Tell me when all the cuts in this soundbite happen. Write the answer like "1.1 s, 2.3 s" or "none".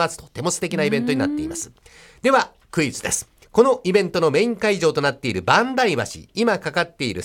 3.4 s